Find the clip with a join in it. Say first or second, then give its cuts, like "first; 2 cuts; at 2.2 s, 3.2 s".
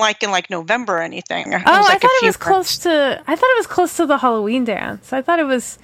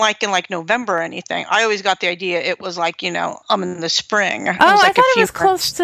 first; 1 cut; at 1.5 s